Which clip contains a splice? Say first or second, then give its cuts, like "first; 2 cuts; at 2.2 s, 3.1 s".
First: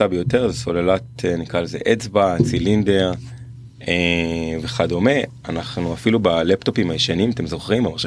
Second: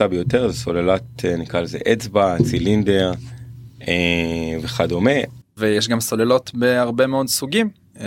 second; 1 cut; at 5.4 s